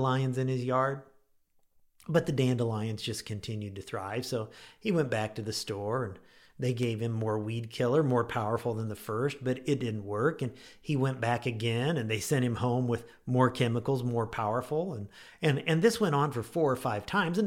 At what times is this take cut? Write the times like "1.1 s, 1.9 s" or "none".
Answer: none